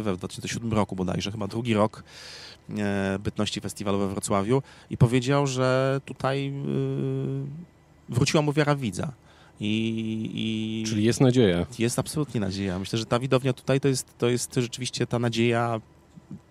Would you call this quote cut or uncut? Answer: uncut